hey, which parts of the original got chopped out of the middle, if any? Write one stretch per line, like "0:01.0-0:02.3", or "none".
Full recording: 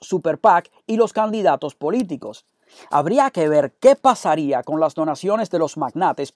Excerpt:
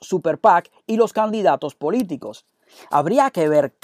none